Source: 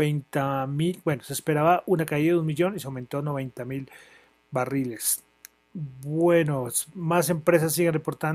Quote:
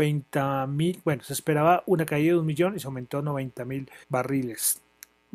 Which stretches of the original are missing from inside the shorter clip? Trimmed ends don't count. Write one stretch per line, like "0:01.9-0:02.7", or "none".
0:04.0-0:04.4